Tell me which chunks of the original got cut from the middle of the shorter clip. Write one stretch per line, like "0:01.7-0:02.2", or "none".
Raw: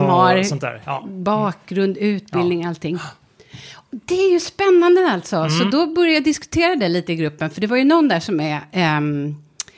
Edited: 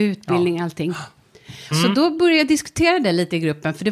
0:03.8-0:05.5